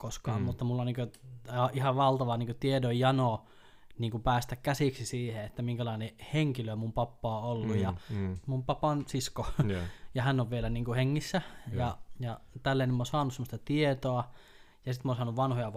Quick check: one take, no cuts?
no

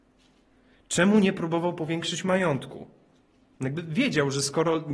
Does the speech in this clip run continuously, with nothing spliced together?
no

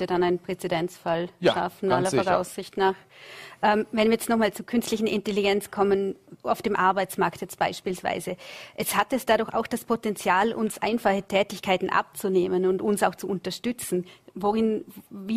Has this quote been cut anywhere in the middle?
no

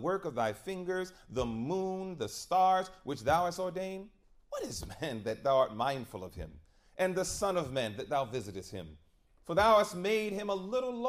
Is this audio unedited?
yes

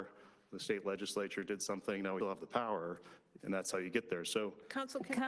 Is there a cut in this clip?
yes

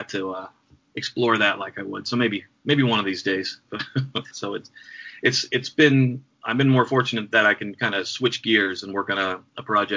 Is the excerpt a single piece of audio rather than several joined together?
no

